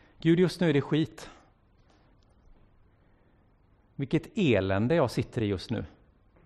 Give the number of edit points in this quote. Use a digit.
0